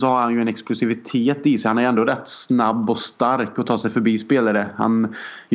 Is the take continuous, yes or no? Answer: yes